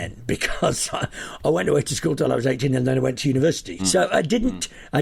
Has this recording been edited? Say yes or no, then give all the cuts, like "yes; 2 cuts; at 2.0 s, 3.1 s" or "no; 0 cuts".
yes; 1 cut; at 3.8 s